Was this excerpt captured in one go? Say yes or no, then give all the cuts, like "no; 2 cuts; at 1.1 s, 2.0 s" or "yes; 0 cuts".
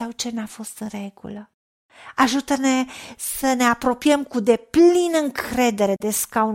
yes; 0 cuts